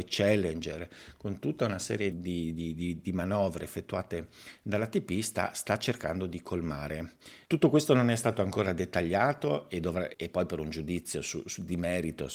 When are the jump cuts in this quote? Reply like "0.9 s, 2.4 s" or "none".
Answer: 2.1 s, 7.4 s, 10.1 s